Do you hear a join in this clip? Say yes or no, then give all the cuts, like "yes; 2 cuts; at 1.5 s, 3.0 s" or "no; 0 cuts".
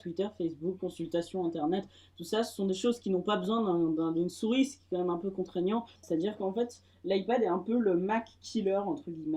yes; 1 cut; at 6.0 s